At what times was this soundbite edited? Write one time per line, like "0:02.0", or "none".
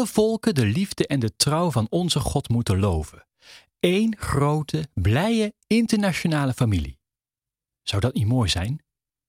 none